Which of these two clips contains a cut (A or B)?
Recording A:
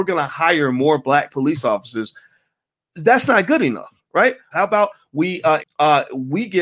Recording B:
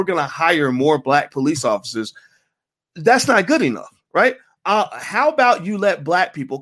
A